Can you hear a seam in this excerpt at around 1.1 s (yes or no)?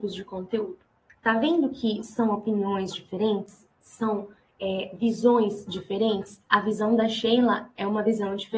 yes